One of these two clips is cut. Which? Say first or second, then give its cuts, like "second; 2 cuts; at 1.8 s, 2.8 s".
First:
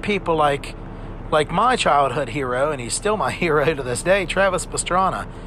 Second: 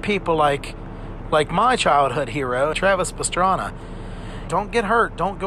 second; 2 cuts; at 2.7 s, 4.5 s